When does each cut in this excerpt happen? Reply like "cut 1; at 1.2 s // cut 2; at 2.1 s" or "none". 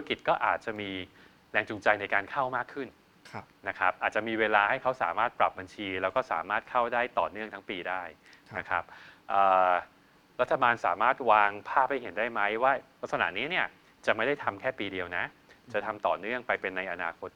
none